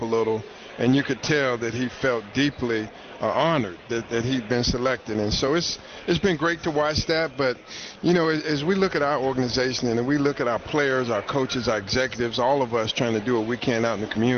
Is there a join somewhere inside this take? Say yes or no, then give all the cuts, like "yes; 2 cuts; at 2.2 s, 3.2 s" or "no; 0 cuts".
no; 0 cuts